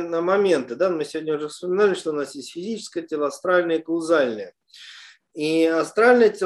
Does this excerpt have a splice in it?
no; 0 cuts

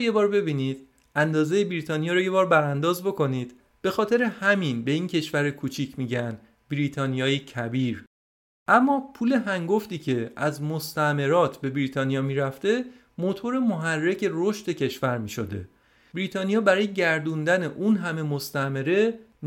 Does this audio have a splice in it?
no; 0 cuts

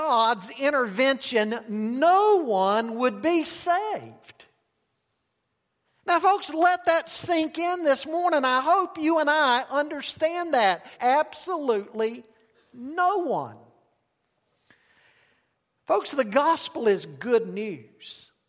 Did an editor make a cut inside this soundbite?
yes; 2 cuts; at 10.9 s, 15.8 s

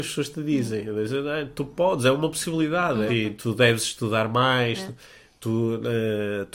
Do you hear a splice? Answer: yes; 1 cut; at 3.1 s

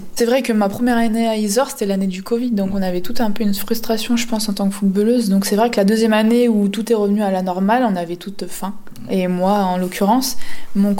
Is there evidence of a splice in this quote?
no; 0 cuts

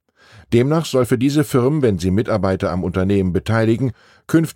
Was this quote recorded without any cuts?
yes; 0 cuts

